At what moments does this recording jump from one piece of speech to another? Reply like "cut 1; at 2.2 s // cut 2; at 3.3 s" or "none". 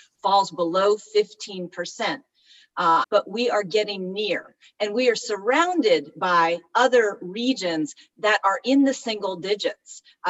cut 1; at 3.0 s

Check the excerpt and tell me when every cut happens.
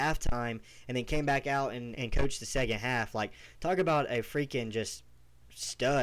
cut 1; at 2.0 s

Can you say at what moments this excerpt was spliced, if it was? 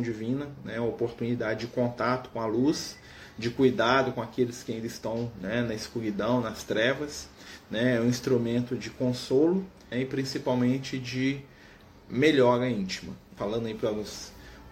cut 1; at 9.9 s // cut 2; at 13.4 s

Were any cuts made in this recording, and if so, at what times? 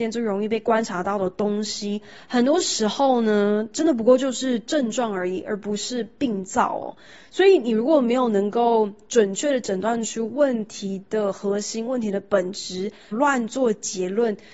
cut 1; at 13.1 s

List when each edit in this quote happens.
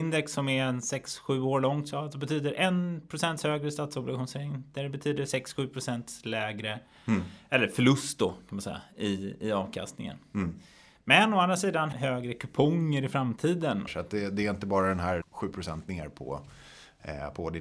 cut 1; at 11.9 s // cut 2; at 13.9 s // cut 3; at 15.2 s

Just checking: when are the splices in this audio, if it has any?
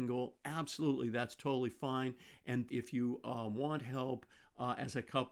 cut 1; at 2.7 s

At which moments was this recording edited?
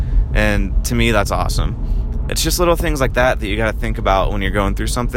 cut 1; at 2.3 s

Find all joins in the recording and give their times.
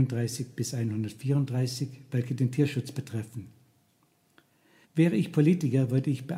cut 1; at 4.8 s

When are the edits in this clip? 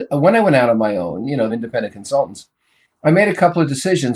cut 1; at 1.5 s

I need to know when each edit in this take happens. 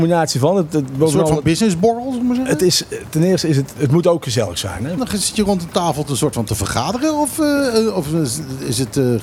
cut 1; at 5.0 s

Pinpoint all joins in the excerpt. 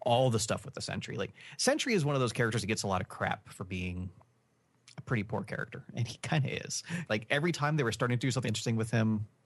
cut 1; at 7.1 s // cut 2; at 8.4 s

